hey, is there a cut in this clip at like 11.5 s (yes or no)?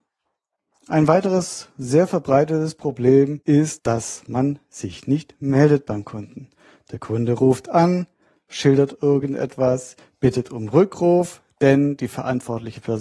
no